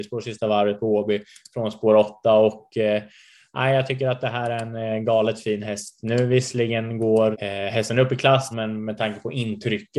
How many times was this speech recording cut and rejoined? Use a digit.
2